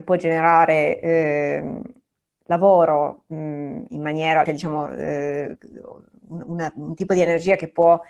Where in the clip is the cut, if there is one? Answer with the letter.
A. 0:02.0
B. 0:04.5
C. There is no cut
B